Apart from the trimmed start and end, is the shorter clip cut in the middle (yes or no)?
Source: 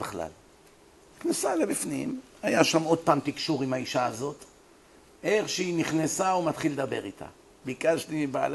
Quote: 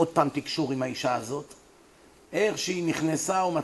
no